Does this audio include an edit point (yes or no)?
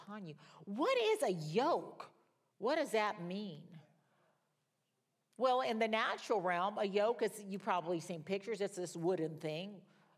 no